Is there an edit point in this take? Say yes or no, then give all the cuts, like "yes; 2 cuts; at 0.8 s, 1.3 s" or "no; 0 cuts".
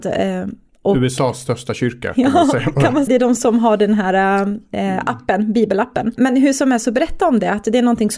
yes; 2 cuts; at 3.1 s, 6.2 s